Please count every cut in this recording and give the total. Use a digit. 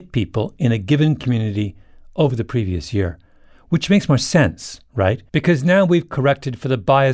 1